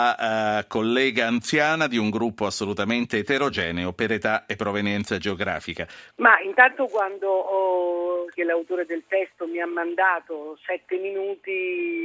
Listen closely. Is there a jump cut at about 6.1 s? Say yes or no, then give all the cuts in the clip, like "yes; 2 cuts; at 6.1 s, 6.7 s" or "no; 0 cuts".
yes; 2 cuts; at 6.1 s, 8.3 s